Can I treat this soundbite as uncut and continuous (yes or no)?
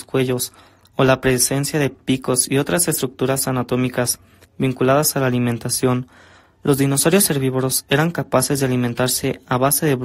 yes